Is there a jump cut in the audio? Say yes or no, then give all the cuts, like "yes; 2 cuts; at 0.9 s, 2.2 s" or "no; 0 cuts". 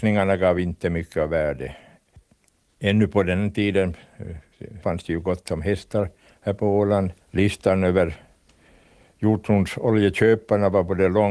yes; 2 cuts; at 4.8 s, 7.2 s